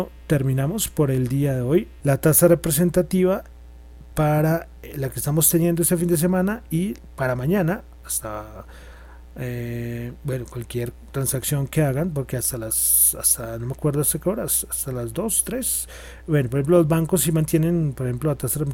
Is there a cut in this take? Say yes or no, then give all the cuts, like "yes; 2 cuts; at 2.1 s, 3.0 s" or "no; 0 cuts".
yes; 1 cut; at 2.0 s